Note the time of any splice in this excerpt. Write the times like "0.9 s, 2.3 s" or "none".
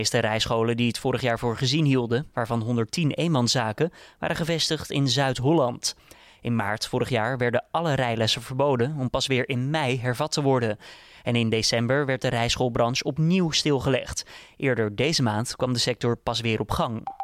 2.3 s